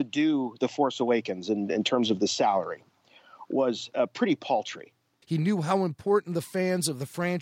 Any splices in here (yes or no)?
yes